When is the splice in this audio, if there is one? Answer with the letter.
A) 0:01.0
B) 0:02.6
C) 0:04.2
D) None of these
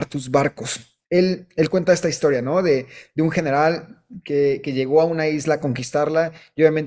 A